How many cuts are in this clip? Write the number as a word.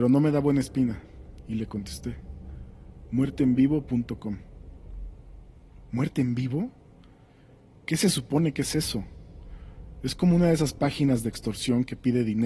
one